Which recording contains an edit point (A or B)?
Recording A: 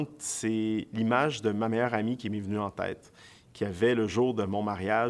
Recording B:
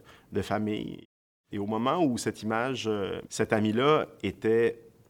B